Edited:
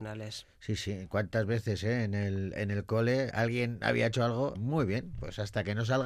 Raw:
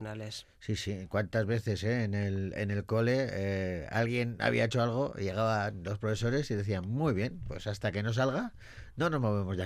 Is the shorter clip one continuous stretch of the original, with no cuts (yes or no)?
no